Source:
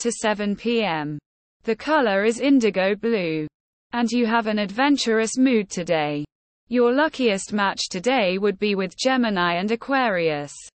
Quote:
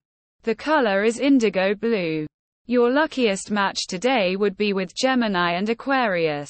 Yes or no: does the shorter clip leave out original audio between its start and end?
yes